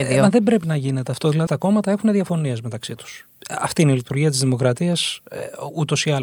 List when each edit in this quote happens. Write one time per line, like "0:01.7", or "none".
0:01.5